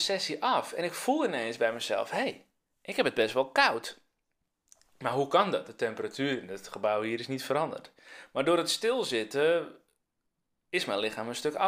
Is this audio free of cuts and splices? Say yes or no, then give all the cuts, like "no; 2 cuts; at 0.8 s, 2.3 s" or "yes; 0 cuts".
yes; 0 cuts